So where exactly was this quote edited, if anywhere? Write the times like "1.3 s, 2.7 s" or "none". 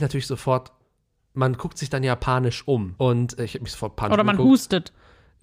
3.0 s